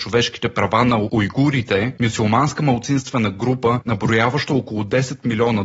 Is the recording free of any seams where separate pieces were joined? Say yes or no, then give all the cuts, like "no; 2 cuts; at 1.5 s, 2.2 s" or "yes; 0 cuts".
yes; 0 cuts